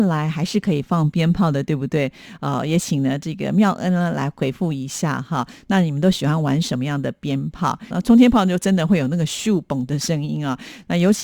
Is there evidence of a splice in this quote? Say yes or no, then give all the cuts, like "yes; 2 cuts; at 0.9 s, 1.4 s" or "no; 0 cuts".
yes; 1 cut; at 7.9 s